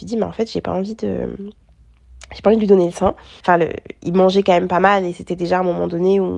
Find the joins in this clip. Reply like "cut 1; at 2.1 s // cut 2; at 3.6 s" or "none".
cut 1; at 3.4 s